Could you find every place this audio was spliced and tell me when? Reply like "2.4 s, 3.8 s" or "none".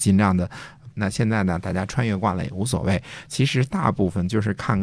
0.9 s